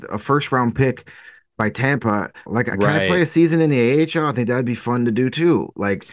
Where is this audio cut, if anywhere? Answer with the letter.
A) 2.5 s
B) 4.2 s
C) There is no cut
A